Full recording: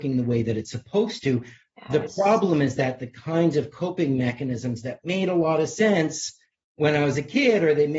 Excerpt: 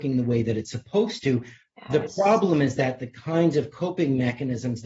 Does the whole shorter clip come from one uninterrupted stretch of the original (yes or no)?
yes